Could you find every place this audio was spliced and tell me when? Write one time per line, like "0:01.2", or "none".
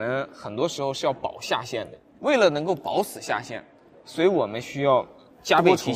none